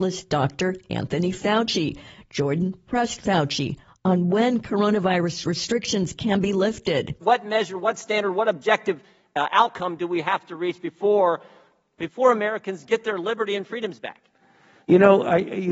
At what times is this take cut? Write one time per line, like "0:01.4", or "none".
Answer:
none